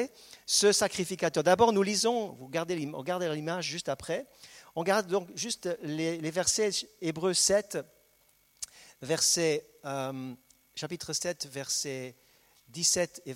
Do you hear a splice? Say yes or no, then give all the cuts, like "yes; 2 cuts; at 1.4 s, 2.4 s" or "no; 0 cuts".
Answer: no; 0 cuts